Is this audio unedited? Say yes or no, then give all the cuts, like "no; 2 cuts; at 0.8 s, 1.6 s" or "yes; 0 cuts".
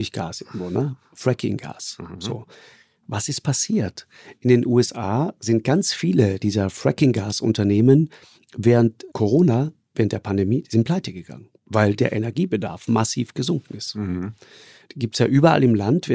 no; 2 cuts; at 9.1 s, 11.5 s